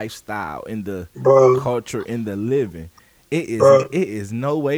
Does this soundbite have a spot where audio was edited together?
no; 0 cuts

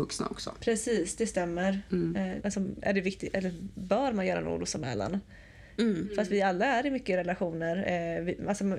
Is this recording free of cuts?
no; 2 cuts; at 2.4 s, 5.8 s

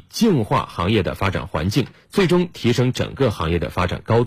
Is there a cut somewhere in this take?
yes; 1 cut; at 1.9 s

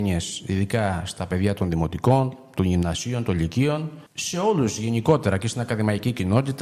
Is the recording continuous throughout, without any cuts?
no; 1 cut; at 4.1 s

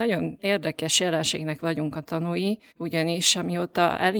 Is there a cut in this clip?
yes; 1 cut; at 2.7 s

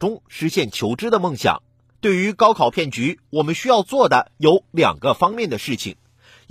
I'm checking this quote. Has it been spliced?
yes; 1 cut; at 1.9 s

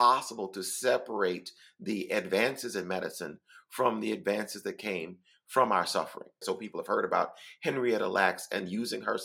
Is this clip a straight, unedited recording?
no; 1 cut; at 6.4 s

